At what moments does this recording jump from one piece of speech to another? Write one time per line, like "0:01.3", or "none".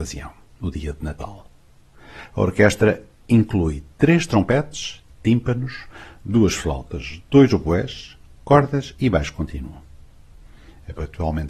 none